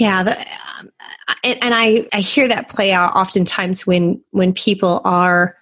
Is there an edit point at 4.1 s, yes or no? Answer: no